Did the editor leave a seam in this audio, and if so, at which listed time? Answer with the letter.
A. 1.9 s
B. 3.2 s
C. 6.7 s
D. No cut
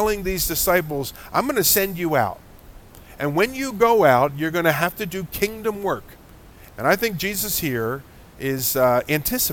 C